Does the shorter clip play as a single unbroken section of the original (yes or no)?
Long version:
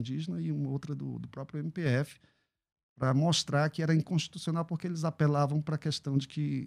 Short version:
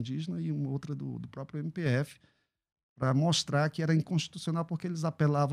yes